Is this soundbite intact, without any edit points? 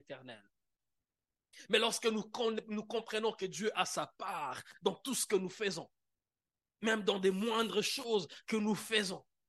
yes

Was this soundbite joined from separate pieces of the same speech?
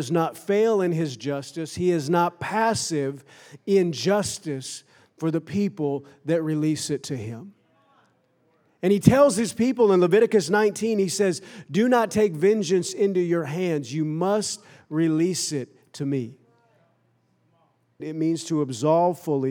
yes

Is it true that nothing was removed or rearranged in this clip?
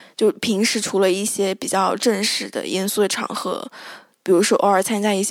yes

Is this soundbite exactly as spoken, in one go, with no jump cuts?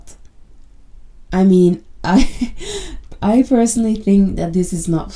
yes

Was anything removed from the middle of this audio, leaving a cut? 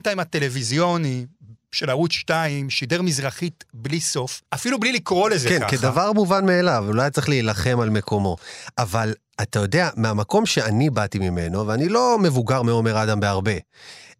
yes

